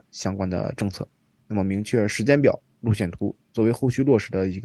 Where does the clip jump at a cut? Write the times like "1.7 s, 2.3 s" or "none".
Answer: 1.4 s